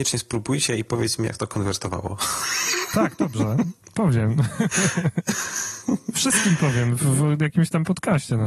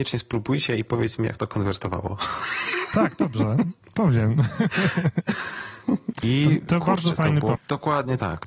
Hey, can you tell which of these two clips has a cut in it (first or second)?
second